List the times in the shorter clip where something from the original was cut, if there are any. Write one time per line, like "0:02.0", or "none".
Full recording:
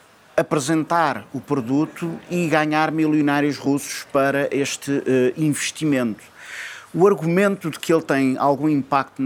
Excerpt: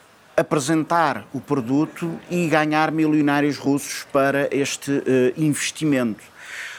none